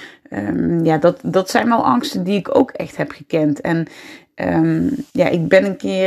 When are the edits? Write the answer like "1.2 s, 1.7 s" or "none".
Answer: 5.1 s